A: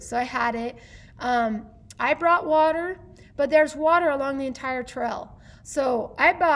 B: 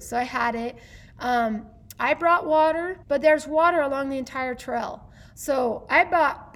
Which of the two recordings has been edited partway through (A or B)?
B